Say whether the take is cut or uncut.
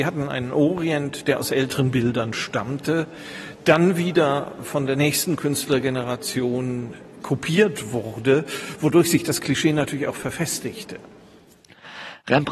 uncut